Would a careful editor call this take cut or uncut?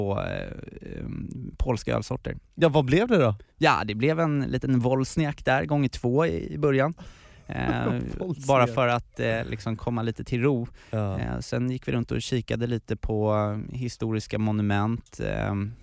uncut